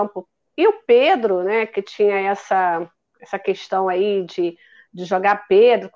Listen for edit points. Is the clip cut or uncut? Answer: uncut